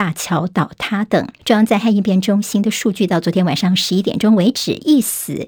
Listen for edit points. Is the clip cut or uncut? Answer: cut